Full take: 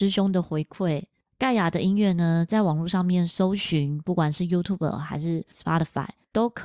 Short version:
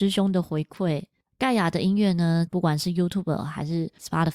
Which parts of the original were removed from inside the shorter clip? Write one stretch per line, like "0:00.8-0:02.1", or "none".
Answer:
0:02.5-0:04.0